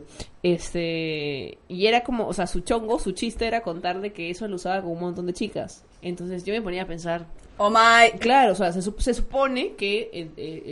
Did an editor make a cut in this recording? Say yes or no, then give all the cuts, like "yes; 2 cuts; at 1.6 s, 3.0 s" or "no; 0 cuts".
yes; 1 cut; at 5.9 s